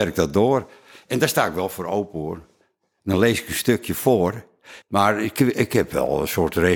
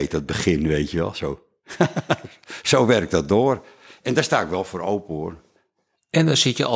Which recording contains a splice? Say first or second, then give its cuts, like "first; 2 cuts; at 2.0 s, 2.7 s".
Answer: first; 2 cuts; at 3.0 s, 4.8 s